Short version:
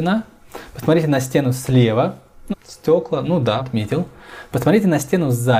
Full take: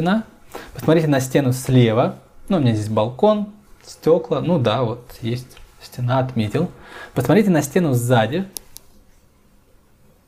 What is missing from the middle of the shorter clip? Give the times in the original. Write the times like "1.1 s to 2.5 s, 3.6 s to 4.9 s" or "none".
2.5 s to 3.7 s, 4.8 s to 6.2 s

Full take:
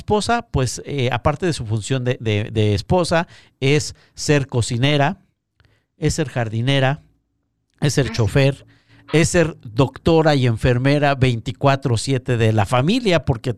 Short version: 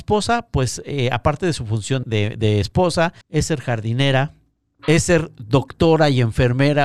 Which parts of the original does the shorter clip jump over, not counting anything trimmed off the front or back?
2.0 s to 2.2 s, 3.4 s to 5.9 s, 7.5 s to 9.0 s

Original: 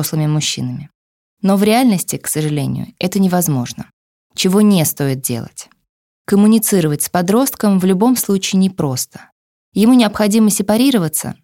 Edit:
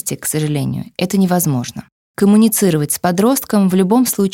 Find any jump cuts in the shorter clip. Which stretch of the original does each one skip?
4.0 s to 6.1 s

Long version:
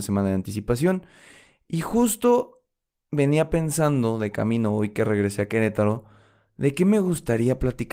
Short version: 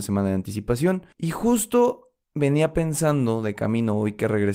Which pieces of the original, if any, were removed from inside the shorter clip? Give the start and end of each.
1.1 s to 1.6 s, 2.7 s to 3.0 s

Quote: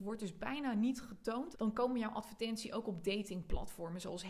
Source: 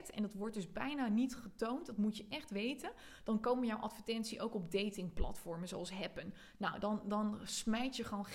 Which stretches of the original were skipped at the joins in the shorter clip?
1.9 s to 3.2 s

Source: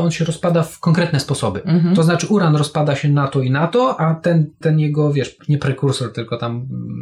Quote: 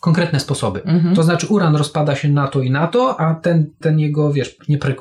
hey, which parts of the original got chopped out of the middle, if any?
none

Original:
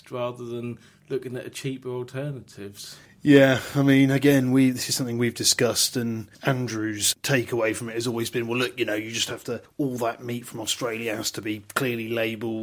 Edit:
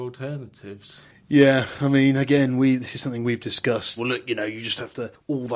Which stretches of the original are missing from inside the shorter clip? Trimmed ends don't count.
5.9 s to 8.5 s

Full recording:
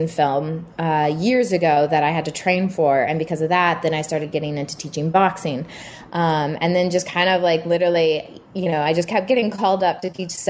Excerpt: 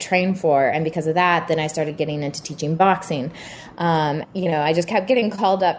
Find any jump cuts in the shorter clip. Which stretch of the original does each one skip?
6.6 s to 8.4 s

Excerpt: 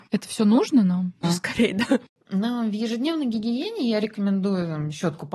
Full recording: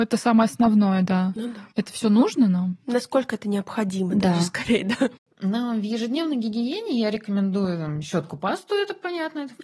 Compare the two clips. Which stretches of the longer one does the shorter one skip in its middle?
2.9 s to 4.3 s

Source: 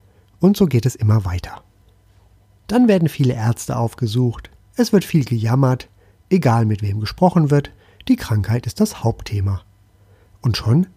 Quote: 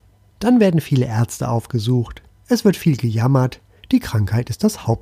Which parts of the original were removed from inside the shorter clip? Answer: 6.0 s to 7.9 s

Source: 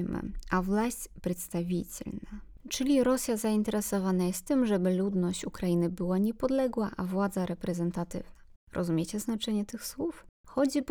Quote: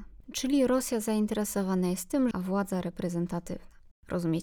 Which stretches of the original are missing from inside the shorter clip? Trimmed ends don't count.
4.7 s to 7.0 s

